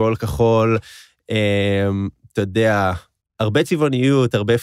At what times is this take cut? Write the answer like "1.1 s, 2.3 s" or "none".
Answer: 3.2 s